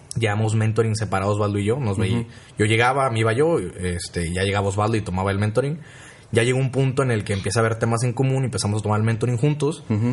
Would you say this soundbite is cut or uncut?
uncut